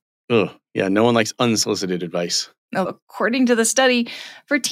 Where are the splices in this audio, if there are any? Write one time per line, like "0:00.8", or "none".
0:02.9